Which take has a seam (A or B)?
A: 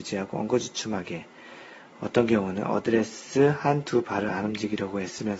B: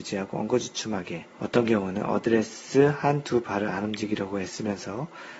B